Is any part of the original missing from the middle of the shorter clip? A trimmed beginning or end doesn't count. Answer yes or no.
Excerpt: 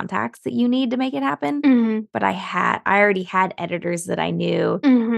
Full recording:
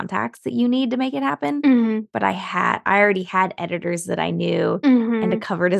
no